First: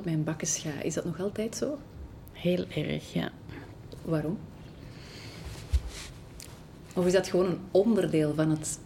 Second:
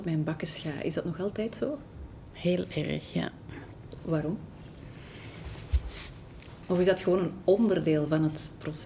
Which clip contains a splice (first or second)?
second